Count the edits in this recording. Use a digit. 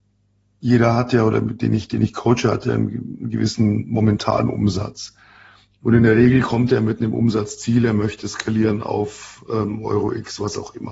0